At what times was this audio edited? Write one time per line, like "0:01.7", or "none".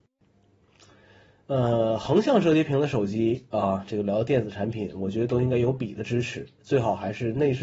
none